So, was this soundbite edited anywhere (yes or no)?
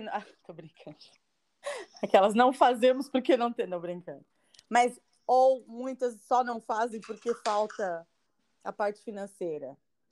no